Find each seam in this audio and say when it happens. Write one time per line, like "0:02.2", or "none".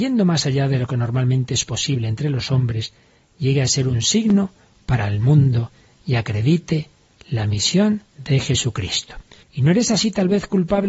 0:08.1
0:09.4